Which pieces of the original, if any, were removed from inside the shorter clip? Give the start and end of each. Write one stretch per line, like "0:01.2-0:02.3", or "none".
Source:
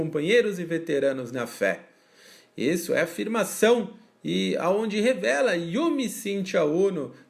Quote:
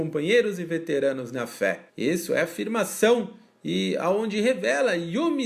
0:01.9-0:02.5